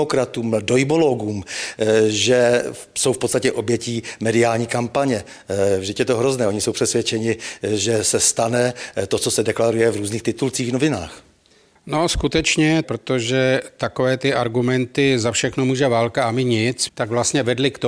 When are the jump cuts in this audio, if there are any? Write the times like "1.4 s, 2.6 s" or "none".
12.8 s, 16.9 s